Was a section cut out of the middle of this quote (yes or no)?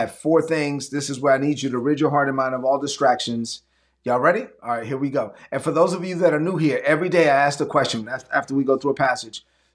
no